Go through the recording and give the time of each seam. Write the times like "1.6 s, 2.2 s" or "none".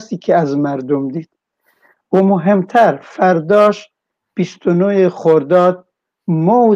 none